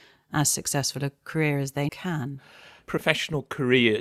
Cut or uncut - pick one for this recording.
cut